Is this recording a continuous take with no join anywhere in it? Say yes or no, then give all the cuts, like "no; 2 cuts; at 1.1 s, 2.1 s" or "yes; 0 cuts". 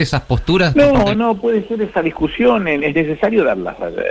no; 1 cut; at 1.1 s